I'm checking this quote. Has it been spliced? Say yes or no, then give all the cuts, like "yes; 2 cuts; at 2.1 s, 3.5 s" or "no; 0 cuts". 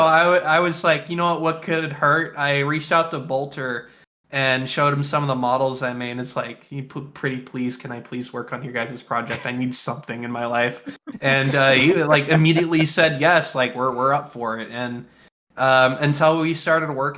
no; 0 cuts